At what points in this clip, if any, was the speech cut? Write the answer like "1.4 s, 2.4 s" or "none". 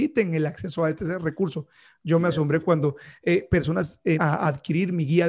4.2 s